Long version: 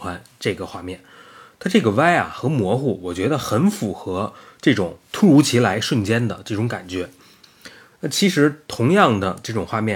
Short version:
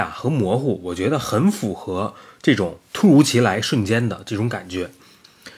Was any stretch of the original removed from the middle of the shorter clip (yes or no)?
no